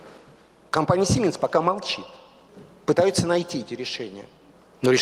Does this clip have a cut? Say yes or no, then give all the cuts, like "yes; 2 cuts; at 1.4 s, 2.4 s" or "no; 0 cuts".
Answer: no; 0 cuts